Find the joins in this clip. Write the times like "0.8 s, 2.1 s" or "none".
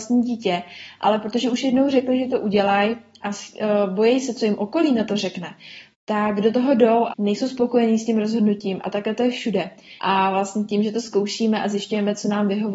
7.1 s, 10.0 s